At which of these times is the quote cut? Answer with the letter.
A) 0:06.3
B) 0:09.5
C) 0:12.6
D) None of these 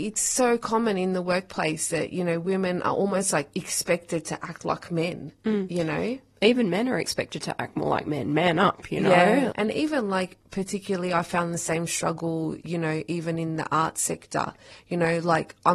B